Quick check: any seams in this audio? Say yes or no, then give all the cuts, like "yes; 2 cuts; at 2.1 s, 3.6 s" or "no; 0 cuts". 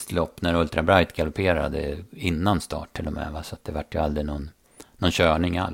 no; 0 cuts